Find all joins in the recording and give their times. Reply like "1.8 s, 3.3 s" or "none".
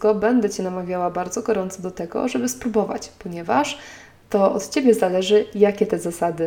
none